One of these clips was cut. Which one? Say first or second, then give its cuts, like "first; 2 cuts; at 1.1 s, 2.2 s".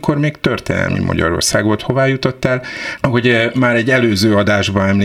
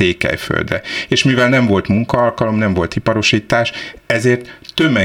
first; 2 cuts; at 1.8 s, 3.0 s